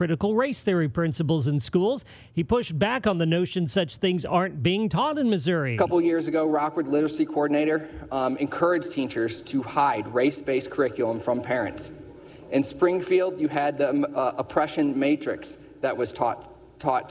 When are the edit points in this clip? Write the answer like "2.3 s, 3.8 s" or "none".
none